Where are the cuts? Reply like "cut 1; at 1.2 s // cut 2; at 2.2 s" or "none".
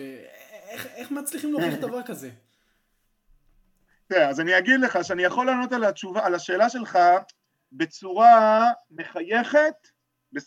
none